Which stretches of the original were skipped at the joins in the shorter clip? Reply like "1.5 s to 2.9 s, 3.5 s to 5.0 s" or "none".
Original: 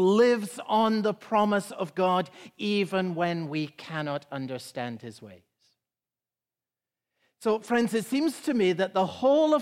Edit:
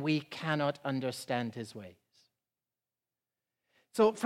none